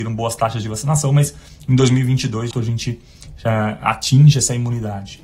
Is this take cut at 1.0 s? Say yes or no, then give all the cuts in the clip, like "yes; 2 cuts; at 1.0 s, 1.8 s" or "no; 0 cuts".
no; 1 cut; at 2.5 s